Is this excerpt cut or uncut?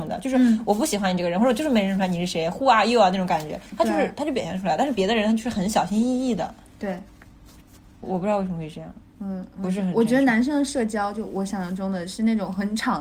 uncut